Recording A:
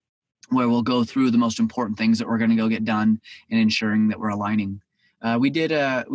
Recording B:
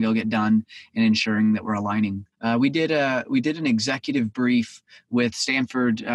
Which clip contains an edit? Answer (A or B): B